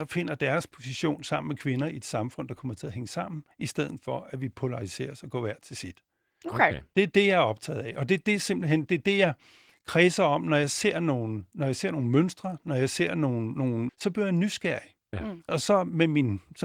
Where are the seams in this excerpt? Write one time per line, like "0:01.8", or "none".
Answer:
0:13.9